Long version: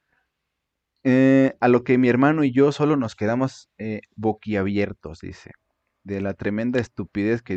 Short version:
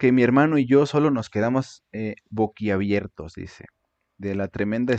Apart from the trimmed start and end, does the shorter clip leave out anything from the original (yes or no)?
no